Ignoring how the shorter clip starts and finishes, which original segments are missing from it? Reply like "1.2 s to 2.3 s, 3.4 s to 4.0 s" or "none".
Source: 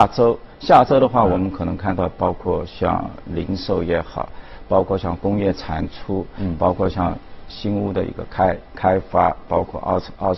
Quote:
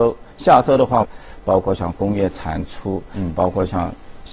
1.2 s to 4.3 s